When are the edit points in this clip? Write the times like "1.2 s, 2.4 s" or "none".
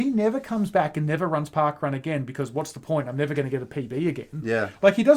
none

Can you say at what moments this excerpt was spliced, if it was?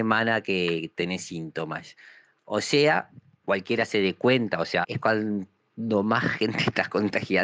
3.4 s, 4.8 s

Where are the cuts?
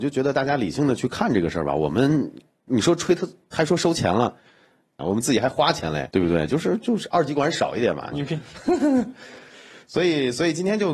5.0 s, 8.1 s

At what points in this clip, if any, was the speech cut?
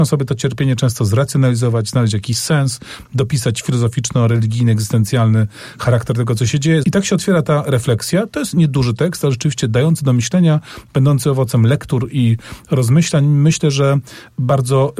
6.8 s

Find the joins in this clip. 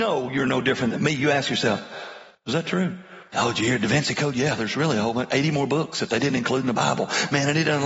3.3 s

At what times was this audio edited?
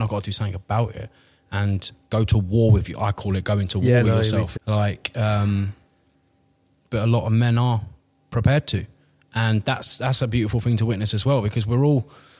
4.6 s

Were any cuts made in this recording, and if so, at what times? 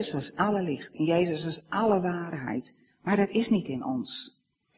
0.9 s

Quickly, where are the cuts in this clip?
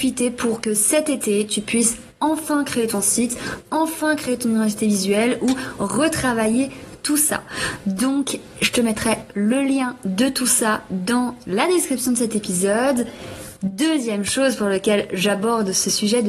13.6 s

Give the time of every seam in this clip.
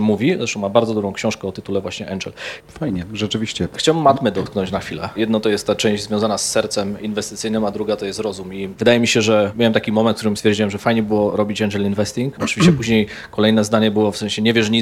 2.6 s

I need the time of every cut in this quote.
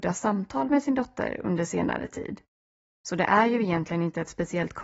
3.0 s

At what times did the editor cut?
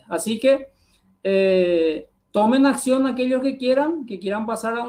2.2 s

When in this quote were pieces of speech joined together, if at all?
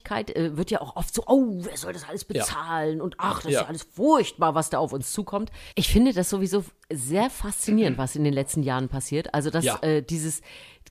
5.7 s

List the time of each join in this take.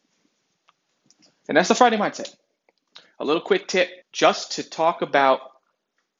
4.0 s

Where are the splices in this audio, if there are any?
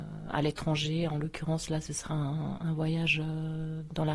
none

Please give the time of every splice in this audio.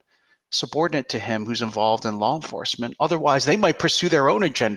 none

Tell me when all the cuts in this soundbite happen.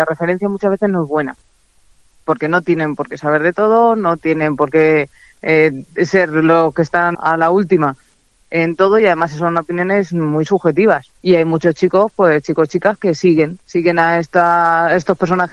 7.1 s, 11.2 s, 13.6 s

